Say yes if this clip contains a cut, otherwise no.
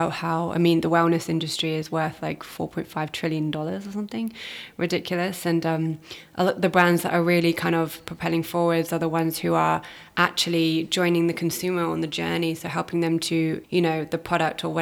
yes